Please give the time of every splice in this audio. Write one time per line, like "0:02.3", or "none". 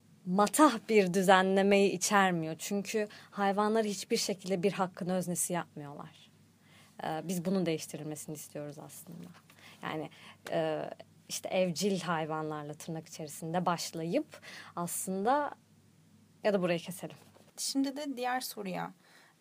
none